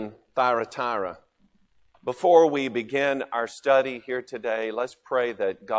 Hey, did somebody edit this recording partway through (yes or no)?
yes